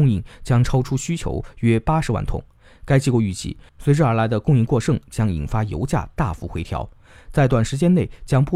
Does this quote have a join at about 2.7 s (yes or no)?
no